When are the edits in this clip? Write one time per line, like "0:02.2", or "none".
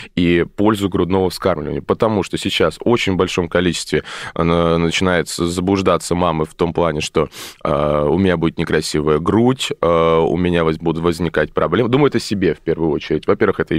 none